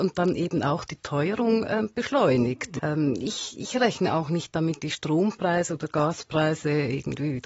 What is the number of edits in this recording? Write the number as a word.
two